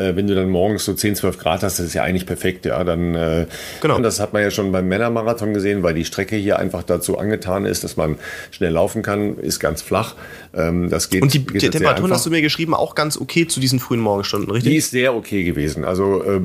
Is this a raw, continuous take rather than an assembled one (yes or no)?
no